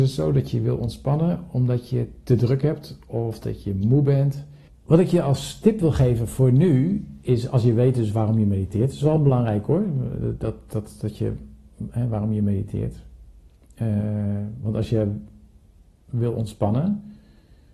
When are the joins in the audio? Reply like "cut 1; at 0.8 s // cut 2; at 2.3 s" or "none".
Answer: cut 1; at 4.7 s